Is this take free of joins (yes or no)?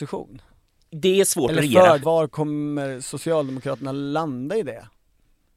no